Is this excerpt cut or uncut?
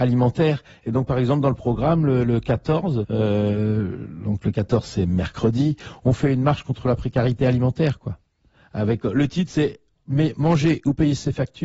cut